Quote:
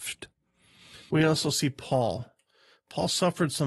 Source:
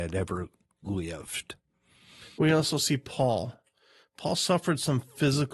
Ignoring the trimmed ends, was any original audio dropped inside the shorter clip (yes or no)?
no